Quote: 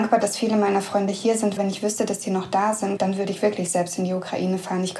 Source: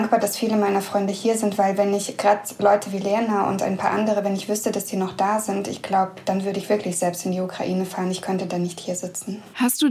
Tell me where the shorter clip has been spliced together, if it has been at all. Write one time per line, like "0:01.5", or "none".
0:01.6
0:03.0